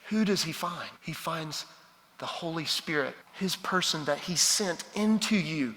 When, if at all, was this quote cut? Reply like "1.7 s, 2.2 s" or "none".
1.0 s, 3.2 s